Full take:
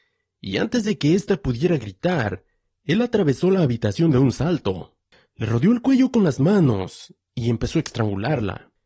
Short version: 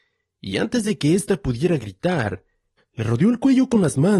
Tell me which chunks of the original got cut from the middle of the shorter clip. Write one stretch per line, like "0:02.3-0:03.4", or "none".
0:02.8-0:05.2